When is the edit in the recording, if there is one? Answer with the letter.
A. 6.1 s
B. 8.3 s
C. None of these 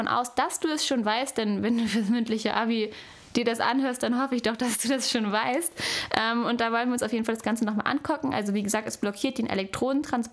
C